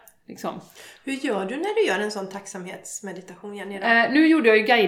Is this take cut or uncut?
uncut